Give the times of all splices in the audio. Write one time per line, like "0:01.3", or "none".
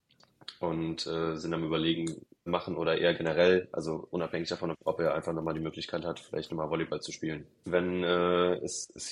0:02.5
0:04.7
0:07.6